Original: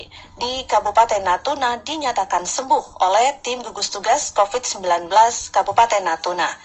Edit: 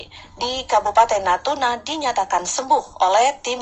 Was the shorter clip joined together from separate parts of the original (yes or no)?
no